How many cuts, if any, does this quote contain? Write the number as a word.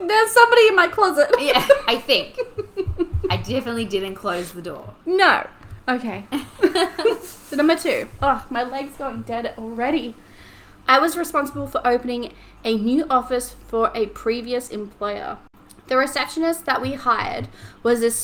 zero